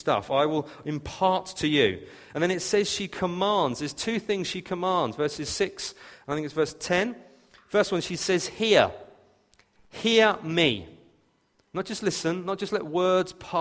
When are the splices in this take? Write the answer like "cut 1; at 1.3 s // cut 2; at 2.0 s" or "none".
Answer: none